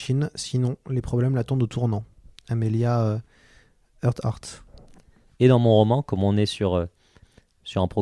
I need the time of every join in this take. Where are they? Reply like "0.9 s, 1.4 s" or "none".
5.3 s